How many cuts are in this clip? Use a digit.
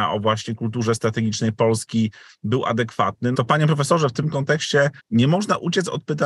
2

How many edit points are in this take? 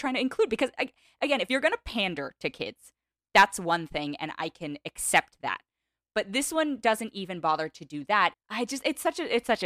1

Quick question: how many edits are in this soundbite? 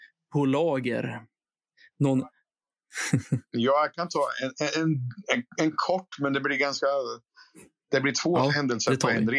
0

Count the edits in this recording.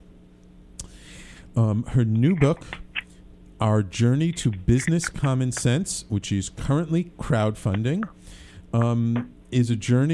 0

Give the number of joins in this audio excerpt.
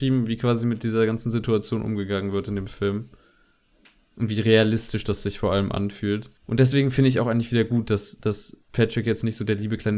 1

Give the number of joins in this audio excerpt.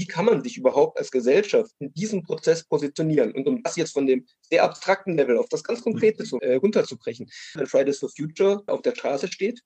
3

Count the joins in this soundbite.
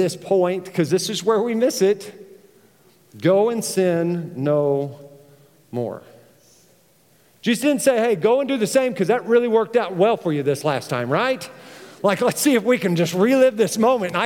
0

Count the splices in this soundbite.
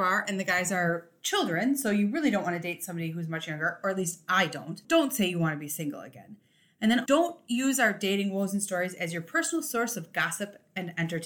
1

